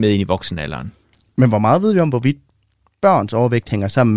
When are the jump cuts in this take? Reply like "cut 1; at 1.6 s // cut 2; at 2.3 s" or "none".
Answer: none

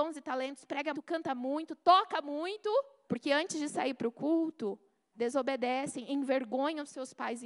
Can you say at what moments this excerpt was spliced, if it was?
cut 1; at 0.9 s // cut 2; at 3.1 s // cut 3; at 5.1 s

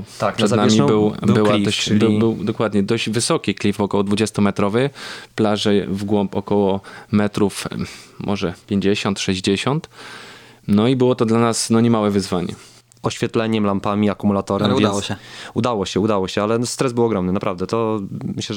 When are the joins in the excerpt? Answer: cut 1; at 12.9 s

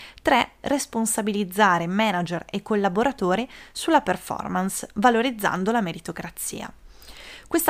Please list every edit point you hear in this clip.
none

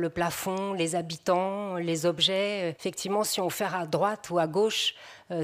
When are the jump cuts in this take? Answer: cut 1; at 2.8 s

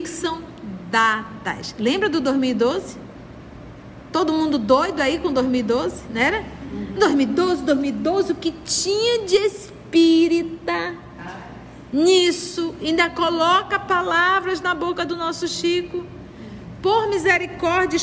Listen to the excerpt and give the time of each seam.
none

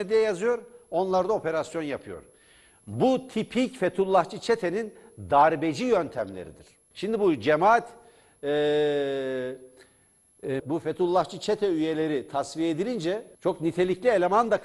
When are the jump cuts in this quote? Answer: cut 1; at 6.9 s // cut 2; at 10.6 s // cut 3; at 13.3 s

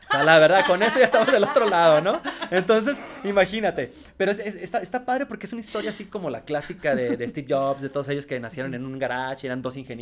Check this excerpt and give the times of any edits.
none

